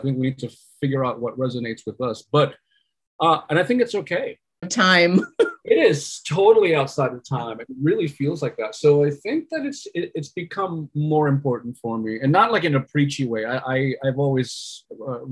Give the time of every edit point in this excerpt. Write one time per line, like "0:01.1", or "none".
0:04.6